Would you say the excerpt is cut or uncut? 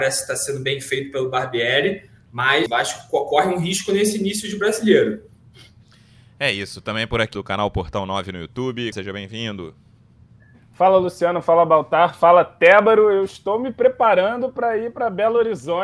cut